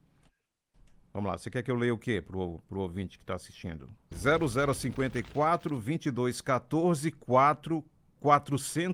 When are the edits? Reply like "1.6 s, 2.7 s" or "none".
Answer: 4.1 s

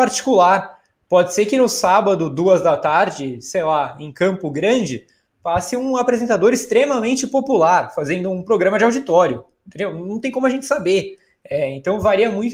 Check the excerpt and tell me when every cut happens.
none

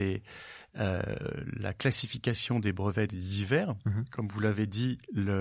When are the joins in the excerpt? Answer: none

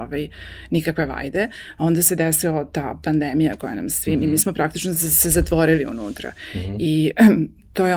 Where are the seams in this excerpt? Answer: none

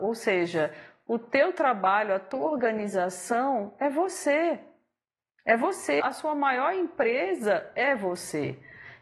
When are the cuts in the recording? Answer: 6.0 s

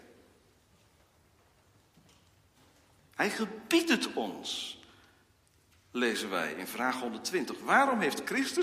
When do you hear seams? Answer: none

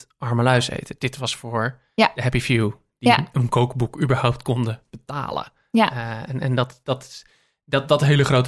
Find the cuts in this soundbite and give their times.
none

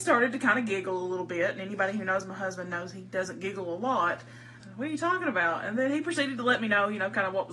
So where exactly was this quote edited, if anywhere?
4.6 s

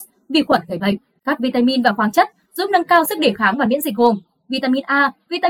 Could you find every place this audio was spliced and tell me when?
none

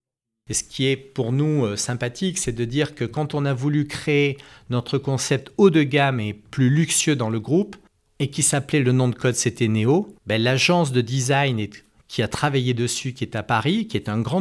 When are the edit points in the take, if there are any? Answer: 10.2 s

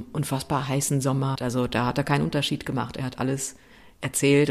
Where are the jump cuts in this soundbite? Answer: 1.3 s

